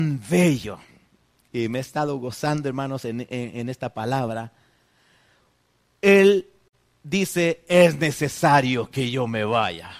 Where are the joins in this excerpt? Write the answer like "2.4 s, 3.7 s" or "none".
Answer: none